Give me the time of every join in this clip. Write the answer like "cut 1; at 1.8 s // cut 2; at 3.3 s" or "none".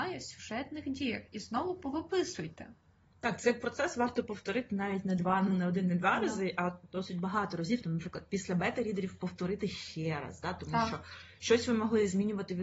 none